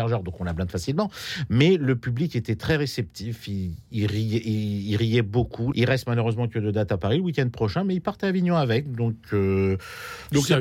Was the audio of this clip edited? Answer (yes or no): yes